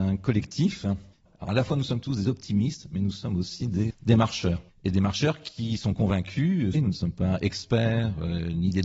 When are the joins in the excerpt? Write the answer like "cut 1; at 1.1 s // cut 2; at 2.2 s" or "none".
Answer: cut 1; at 1.3 s // cut 2; at 3.9 s // cut 3; at 6.7 s